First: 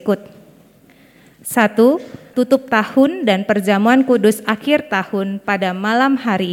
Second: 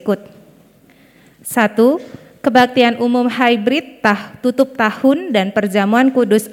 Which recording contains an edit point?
first; 1 cut; at 2.3 s

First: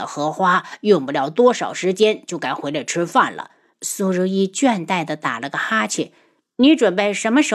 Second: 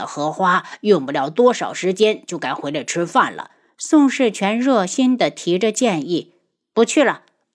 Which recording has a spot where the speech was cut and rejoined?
first; 1 cut; at 3.7 s

